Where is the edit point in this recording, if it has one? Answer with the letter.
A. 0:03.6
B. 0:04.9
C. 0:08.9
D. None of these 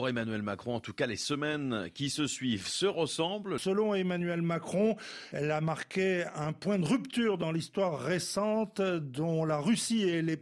A